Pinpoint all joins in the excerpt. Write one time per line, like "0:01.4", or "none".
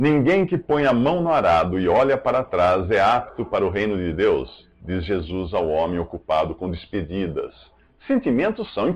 none

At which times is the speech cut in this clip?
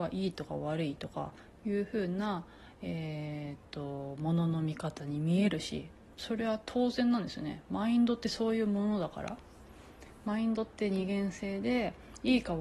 none

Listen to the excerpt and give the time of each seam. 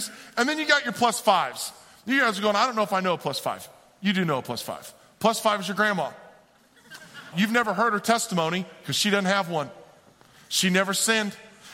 0:07.3

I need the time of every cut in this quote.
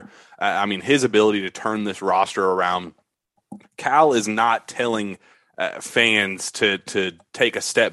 0:03.6

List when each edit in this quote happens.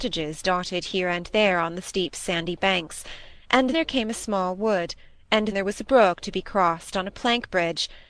0:03.7
0:05.5

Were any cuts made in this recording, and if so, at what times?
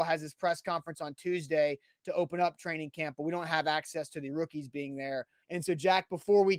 0:05.4

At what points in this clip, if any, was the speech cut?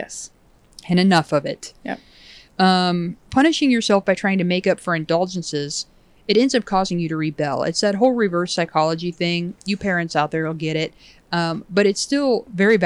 0:03.3

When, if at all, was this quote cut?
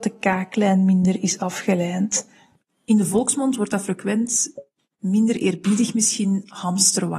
none

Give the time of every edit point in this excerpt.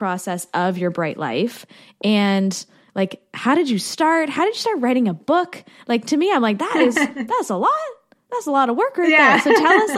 none

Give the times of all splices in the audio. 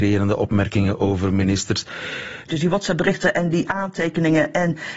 0:02.5

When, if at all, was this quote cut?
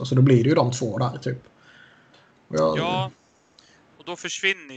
none

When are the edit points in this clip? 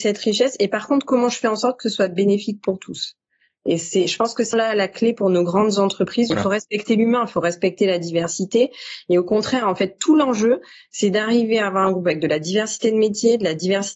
0:04.5
0:06.3

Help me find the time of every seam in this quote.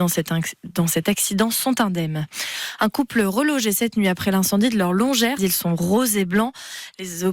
0:05.4

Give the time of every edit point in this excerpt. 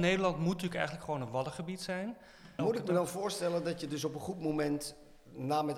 0:02.6

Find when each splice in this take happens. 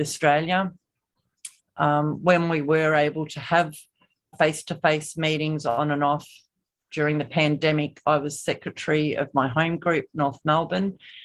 0:01.6
0:04.3

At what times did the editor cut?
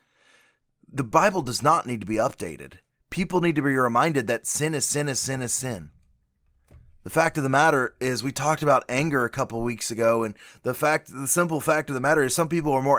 none

